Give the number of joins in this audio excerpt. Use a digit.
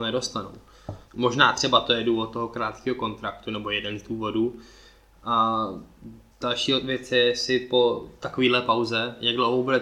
1